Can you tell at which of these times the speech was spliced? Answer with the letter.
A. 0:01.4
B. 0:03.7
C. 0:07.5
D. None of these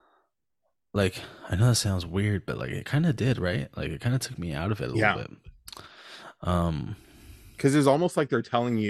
D